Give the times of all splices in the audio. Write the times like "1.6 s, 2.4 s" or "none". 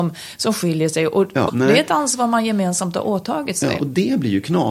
1.5 s, 3.8 s